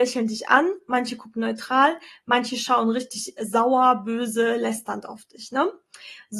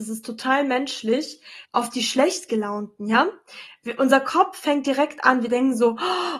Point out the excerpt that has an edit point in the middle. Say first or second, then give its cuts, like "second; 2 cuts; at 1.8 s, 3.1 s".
second; 1 cut; at 1.6 s